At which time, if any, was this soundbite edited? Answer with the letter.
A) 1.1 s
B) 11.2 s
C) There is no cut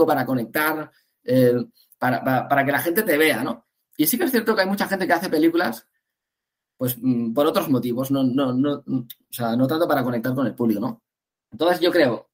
C